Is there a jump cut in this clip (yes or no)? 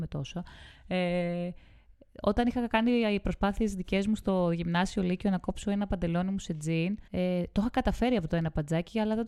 yes